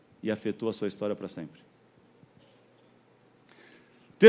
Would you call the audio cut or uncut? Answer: uncut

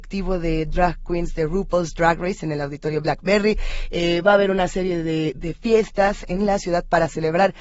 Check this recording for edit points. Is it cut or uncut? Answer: uncut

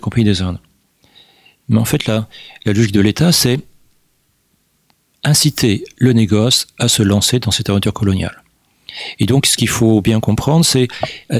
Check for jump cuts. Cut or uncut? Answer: uncut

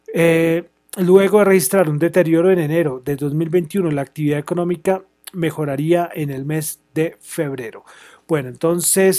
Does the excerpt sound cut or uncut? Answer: uncut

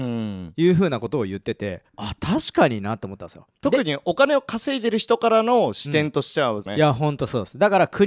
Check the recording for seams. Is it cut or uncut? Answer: cut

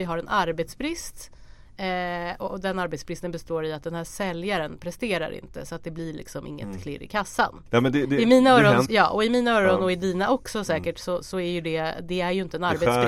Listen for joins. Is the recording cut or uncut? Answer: cut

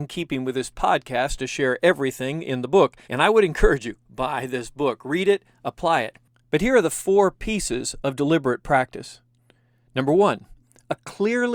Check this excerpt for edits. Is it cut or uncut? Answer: cut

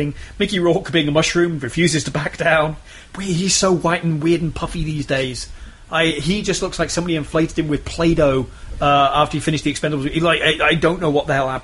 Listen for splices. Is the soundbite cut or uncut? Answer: uncut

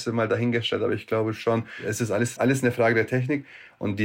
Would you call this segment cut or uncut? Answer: cut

